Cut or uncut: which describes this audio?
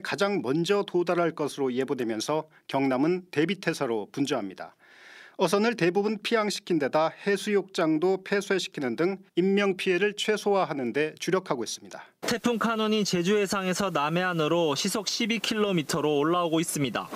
cut